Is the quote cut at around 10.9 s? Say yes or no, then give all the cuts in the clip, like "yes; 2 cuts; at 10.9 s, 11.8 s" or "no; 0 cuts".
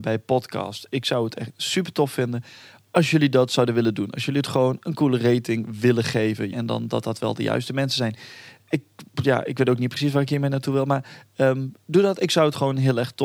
no; 1 cut; at 6.5 s